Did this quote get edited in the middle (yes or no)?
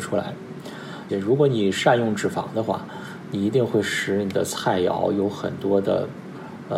yes